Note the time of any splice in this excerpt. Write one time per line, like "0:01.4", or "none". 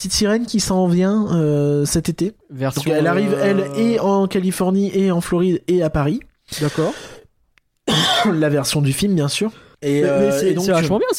none